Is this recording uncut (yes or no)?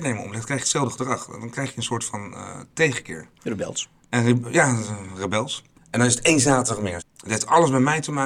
no